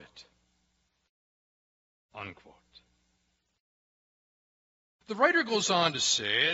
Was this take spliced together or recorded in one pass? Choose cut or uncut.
cut